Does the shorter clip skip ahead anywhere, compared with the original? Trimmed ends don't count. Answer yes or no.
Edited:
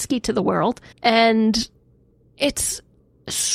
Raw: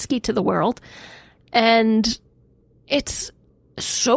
yes